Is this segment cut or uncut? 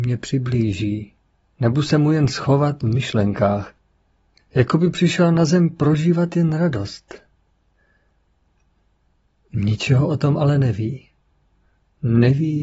cut